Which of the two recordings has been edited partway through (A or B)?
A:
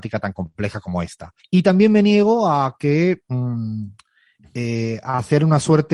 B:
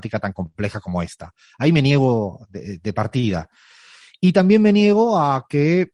A